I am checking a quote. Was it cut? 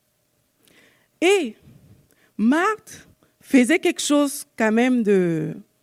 no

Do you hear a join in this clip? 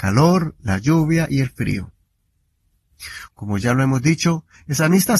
yes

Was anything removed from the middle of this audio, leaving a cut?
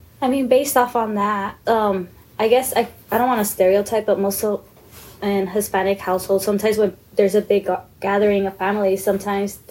yes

